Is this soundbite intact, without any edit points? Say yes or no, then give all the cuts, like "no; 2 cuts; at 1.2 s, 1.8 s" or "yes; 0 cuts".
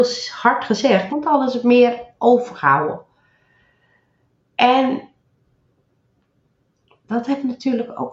no; 1 cut; at 1.1 s